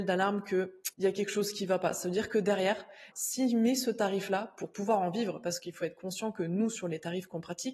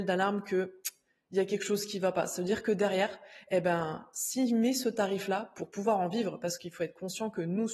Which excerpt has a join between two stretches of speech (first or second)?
first